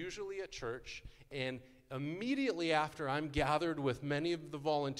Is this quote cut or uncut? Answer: uncut